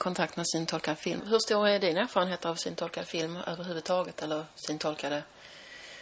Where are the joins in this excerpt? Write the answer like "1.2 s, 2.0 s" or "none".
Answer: 1.2 s